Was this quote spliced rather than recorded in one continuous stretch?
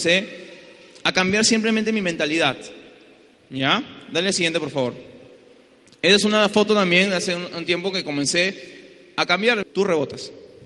yes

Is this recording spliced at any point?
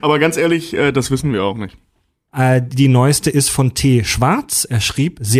yes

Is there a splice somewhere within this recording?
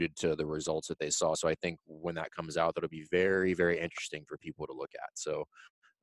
no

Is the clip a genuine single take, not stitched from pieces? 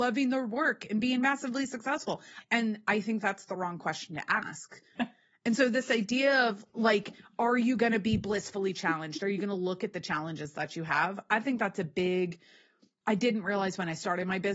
no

